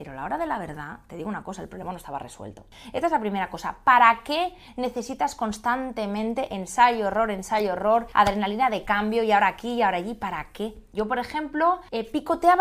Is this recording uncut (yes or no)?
no